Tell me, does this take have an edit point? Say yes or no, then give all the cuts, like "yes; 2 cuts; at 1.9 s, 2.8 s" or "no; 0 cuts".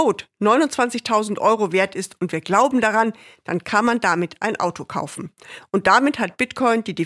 no; 0 cuts